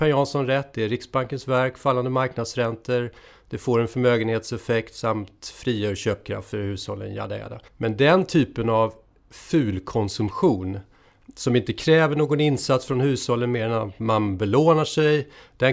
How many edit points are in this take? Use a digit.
1